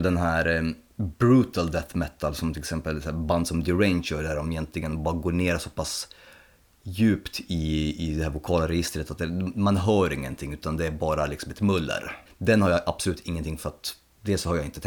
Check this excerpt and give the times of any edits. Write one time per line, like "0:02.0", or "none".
0:12.3
0:13.6